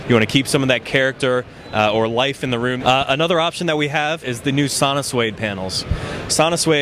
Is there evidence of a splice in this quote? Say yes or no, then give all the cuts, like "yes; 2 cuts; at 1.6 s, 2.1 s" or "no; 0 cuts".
yes; 2 cuts; at 2.8 s, 4.2 s